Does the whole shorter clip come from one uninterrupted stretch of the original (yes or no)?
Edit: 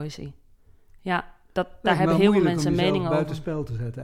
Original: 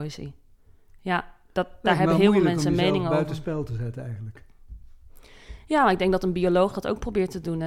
yes